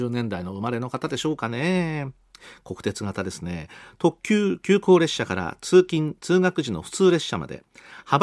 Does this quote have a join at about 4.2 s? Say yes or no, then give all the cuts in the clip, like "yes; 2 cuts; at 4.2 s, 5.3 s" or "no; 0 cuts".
no; 0 cuts